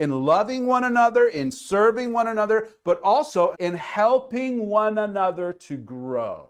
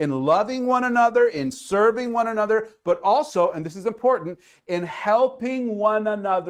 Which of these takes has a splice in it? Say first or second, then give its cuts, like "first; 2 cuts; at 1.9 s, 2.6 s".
first; 1 cut; at 3.5 s